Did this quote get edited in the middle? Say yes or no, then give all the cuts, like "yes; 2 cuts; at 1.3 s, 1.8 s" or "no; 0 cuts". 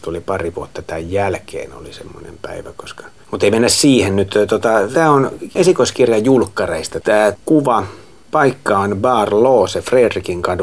yes; 1 cut; at 4.9 s